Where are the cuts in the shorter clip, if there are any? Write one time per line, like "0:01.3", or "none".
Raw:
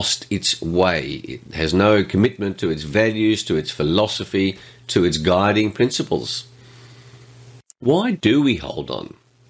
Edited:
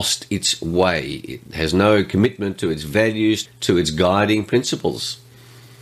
0:03.4